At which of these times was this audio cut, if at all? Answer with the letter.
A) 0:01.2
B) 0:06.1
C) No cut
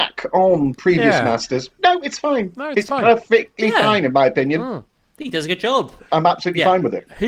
B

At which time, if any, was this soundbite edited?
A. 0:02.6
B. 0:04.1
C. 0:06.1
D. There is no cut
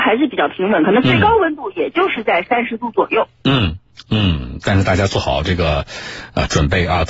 B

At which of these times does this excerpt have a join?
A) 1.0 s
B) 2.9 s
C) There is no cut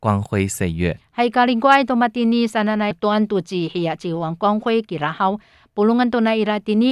B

